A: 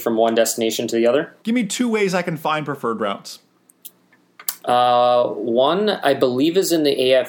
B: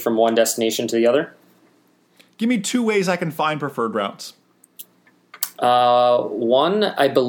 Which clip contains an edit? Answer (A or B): A